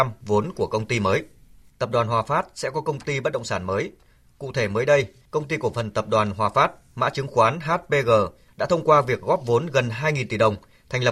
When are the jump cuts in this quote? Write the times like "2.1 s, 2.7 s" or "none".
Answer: 1.7 s